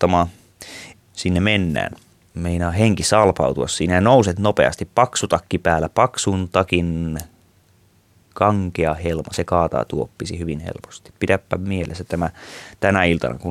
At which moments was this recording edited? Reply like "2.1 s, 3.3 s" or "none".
0.9 s, 2.3 s